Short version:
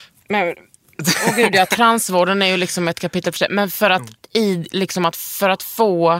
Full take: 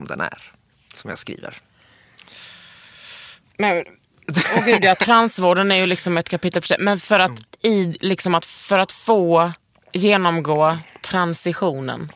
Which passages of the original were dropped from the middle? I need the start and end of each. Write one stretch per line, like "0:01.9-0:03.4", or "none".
none